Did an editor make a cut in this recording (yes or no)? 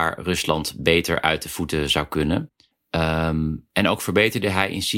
yes